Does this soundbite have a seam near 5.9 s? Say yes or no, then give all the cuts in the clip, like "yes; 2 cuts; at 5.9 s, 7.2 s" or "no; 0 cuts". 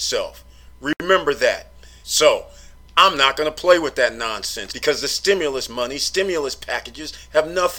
no; 2 cuts; at 2.0 s, 4.7 s